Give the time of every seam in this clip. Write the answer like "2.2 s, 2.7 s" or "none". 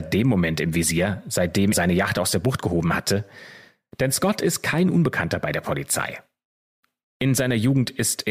1.7 s